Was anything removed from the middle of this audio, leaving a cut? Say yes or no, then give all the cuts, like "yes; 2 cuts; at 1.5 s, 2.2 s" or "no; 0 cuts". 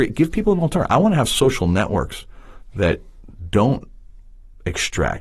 yes; 1 cut; at 2.7 s